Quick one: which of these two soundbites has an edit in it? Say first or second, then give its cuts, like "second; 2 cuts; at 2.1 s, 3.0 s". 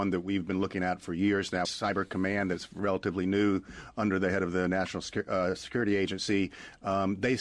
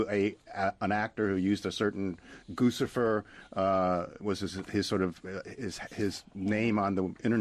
first; 1 cut; at 1.6 s